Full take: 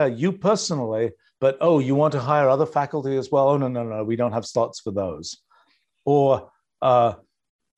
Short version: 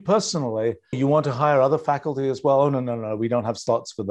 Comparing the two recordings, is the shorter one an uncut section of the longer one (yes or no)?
no